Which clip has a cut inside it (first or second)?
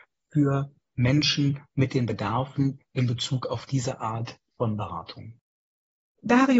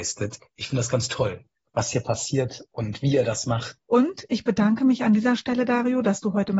second